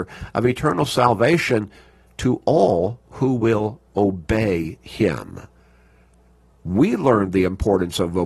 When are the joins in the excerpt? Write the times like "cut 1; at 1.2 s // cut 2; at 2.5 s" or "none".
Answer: none